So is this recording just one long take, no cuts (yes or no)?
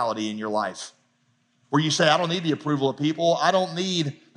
yes